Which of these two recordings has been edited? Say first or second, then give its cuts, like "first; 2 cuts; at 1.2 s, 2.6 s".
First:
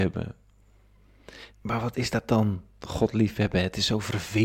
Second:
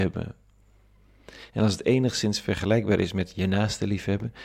first; 1 cut; at 1.5 s